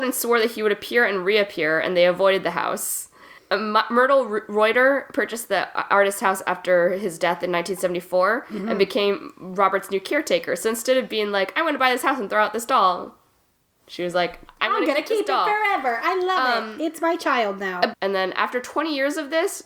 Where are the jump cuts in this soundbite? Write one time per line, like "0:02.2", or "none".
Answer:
0:17.9